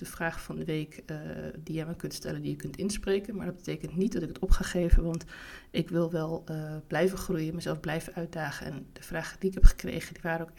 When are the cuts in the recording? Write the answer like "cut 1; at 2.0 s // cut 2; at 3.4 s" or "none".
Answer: none